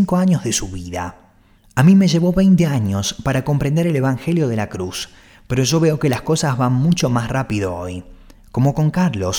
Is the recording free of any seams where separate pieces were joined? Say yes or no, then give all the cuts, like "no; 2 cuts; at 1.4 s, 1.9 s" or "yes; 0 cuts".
yes; 0 cuts